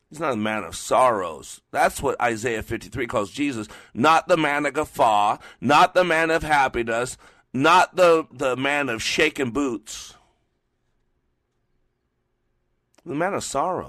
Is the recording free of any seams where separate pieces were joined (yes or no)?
no